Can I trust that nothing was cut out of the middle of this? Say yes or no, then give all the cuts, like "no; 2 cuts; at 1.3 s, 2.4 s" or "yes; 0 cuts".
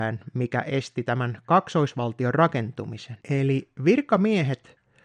no; 1 cut; at 3.2 s